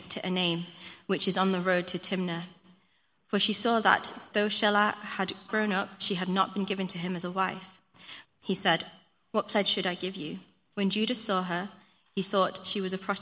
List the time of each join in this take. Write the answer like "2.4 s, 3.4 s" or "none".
5.5 s, 8.2 s, 10.7 s